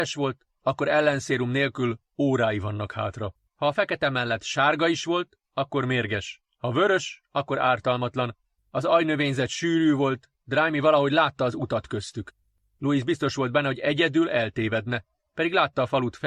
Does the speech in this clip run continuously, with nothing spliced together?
no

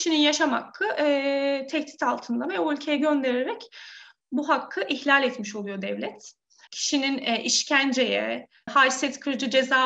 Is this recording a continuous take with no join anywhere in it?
no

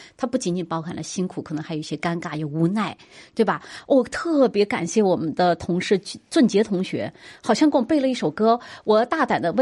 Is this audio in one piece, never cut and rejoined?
yes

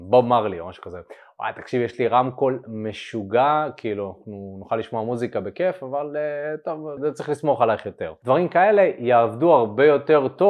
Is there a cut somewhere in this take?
yes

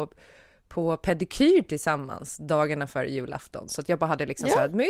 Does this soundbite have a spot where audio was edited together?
no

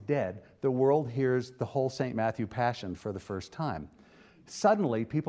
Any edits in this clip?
no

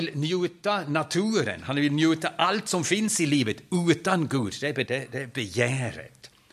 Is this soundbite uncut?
no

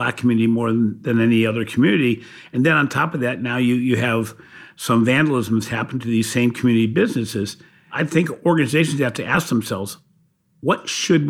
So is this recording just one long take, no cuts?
yes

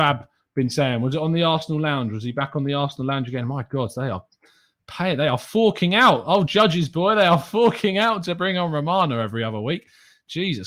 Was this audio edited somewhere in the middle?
no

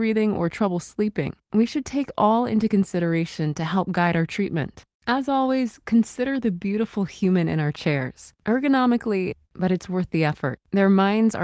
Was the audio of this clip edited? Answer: yes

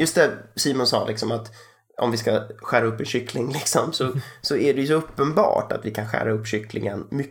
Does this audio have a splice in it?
no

